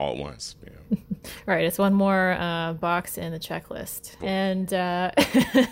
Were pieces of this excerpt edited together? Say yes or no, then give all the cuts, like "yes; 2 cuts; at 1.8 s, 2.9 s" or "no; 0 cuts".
yes; 1 cut; at 4.2 s